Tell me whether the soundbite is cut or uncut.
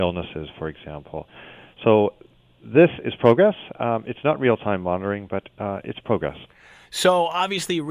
uncut